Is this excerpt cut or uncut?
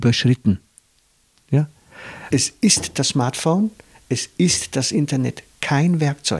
cut